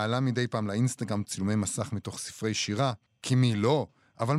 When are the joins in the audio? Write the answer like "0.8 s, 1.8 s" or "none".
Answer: 3.1 s